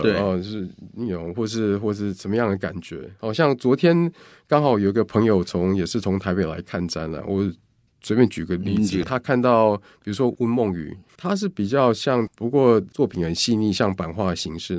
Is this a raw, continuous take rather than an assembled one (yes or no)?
no